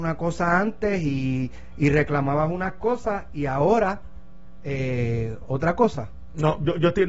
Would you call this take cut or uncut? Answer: uncut